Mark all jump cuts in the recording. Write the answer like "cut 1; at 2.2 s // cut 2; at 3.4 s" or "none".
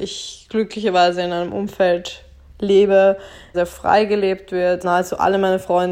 cut 1; at 3.5 s // cut 2; at 4.8 s